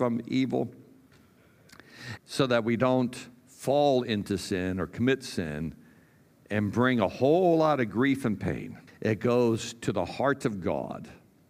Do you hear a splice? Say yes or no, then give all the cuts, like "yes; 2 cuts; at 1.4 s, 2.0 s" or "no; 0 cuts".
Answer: yes; 2 cuts; at 2.2 s, 8.9 s